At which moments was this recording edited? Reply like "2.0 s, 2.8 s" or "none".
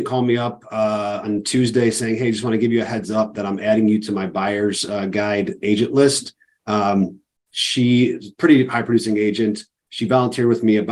none